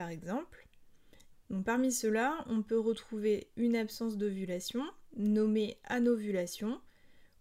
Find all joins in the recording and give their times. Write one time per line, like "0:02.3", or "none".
0:01.3

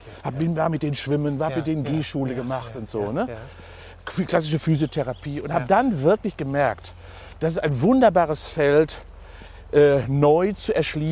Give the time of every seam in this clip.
none

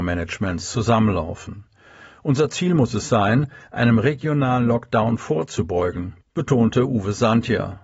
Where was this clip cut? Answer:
none

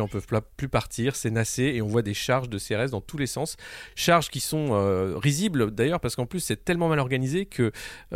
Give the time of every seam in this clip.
none

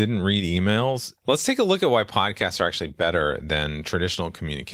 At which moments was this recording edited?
0:01.2

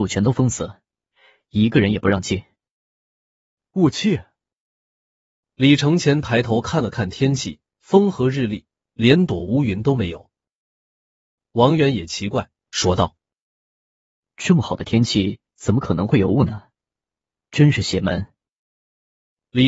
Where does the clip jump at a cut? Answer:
none

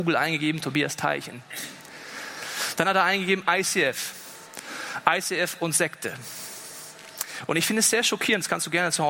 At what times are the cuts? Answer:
none

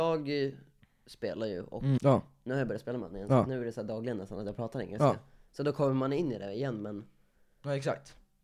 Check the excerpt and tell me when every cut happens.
0:02.0

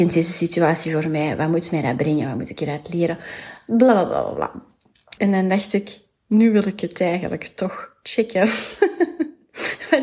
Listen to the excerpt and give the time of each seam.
0:05.2

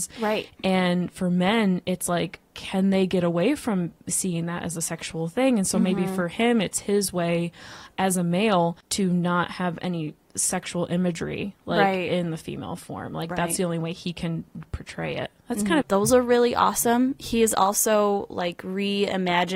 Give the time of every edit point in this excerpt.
0:15.8

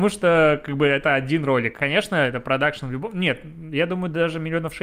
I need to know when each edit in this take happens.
none

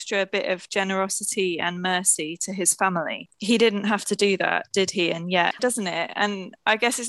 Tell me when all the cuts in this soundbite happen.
0:05.6

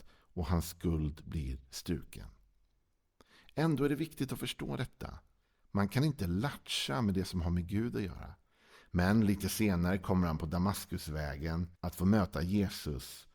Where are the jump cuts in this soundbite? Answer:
0:08.8
0:11.7

